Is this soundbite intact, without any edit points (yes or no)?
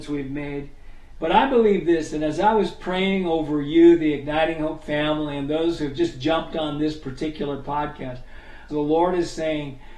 no